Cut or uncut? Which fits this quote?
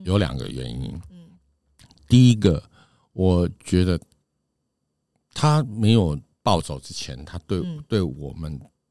uncut